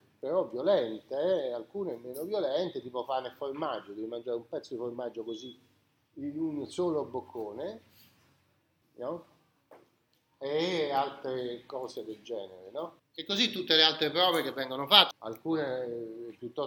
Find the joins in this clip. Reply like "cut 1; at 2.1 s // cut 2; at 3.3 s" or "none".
cut 1; at 8.8 s // cut 2; at 13.0 s // cut 3; at 15.1 s